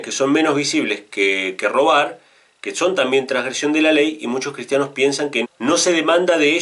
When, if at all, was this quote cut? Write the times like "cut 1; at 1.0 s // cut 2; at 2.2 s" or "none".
cut 1; at 1.1 s // cut 2; at 5.4 s